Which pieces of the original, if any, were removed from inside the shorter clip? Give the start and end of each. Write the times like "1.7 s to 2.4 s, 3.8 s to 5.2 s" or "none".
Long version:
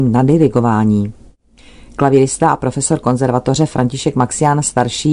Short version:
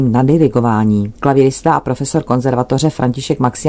1.2 s to 1.9 s